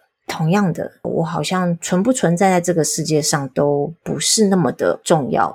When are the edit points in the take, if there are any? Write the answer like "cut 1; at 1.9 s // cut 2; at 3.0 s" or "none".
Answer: cut 1; at 1.0 s

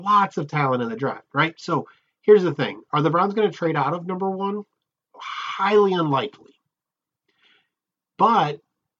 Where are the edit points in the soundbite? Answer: none

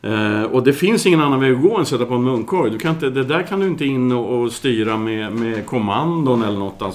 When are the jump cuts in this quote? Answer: none

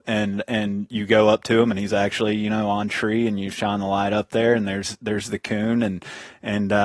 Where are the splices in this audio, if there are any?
none

